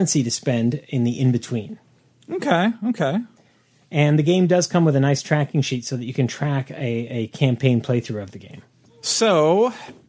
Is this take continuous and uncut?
yes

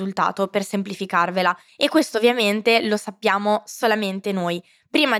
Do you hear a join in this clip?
yes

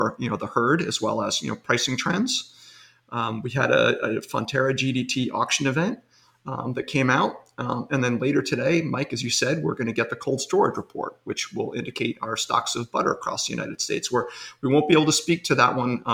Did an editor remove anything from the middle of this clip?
no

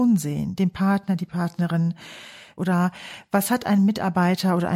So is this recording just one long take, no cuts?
no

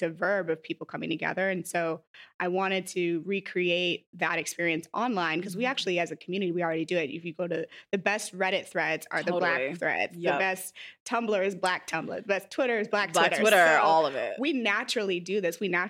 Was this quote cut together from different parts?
no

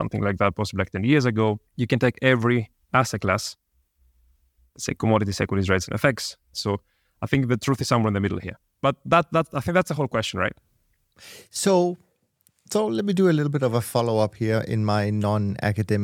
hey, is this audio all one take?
no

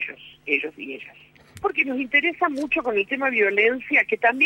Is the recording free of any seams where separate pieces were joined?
no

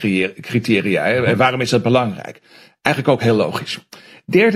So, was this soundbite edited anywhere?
no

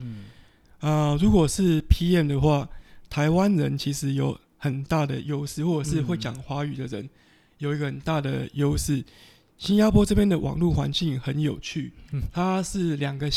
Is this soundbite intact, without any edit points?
no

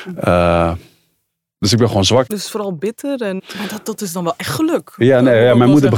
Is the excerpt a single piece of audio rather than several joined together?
no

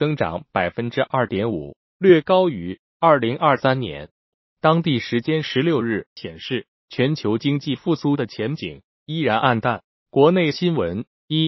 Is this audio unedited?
no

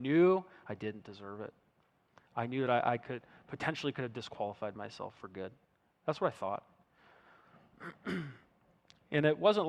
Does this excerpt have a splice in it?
no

